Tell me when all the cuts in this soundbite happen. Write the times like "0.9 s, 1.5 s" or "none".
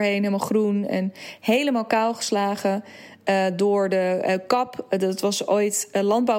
none